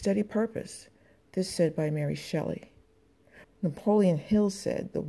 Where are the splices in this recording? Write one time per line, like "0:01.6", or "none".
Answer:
0:03.4